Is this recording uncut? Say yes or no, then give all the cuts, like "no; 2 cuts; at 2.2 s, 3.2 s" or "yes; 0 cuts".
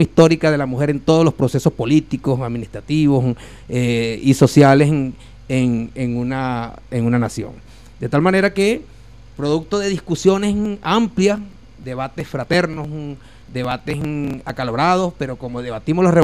yes; 0 cuts